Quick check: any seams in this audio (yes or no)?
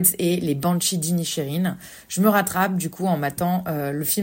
no